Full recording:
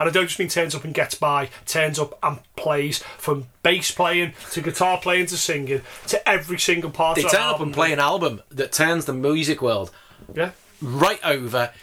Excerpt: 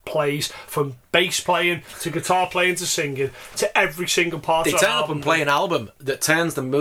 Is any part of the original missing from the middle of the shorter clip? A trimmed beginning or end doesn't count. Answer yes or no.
no